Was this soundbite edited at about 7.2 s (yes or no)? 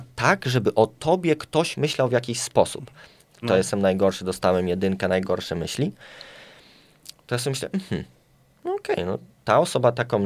no